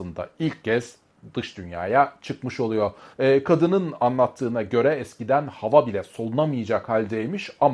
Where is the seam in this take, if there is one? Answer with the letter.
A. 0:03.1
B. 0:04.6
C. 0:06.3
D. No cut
A